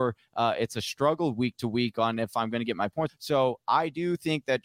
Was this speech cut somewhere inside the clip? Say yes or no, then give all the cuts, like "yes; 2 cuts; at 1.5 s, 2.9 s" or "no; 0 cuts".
yes; 1 cut; at 3.1 s